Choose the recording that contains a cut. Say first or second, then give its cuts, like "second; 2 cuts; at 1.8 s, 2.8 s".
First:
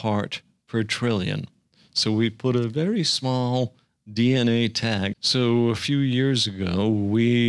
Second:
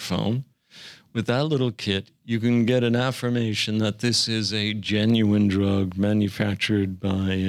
first; 1 cut; at 5.1 s